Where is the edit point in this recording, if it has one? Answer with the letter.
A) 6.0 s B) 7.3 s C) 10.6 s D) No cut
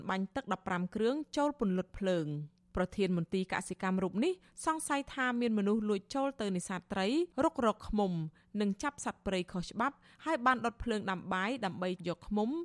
B